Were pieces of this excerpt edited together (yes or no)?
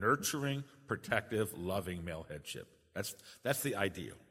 no